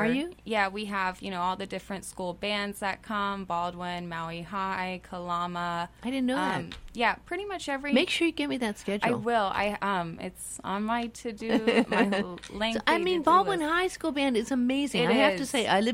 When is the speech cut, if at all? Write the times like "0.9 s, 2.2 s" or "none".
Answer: none